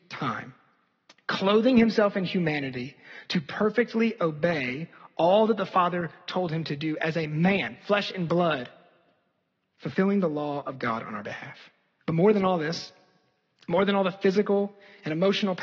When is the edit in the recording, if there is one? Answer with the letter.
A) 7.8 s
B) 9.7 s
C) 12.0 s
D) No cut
C